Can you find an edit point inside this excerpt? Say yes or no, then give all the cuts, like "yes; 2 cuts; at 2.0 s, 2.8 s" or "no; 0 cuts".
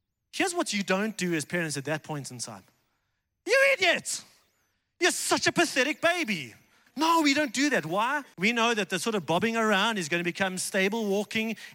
yes; 2 cuts; at 6.9 s, 8.3 s